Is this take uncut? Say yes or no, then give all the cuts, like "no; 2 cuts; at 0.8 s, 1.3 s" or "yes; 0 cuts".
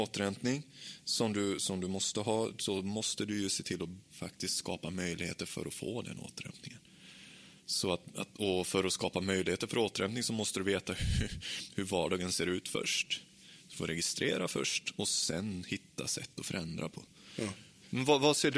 yes; 0 cuts